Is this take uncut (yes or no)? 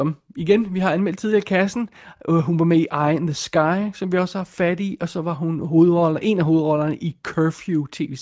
yes